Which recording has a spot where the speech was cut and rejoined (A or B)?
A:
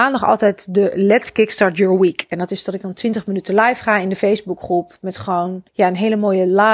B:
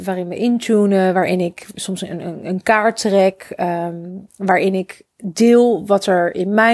A